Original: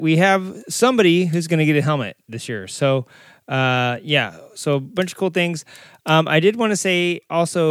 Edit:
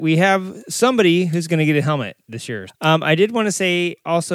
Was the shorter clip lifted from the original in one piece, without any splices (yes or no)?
no